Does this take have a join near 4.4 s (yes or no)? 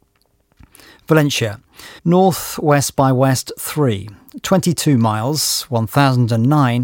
no